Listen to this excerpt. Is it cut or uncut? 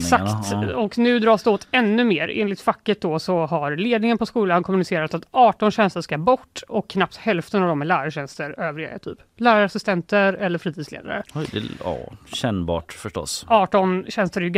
uncut